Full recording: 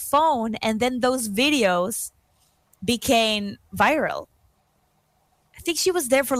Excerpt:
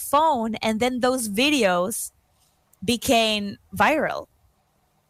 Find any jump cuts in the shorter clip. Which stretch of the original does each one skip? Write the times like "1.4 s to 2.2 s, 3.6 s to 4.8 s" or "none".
none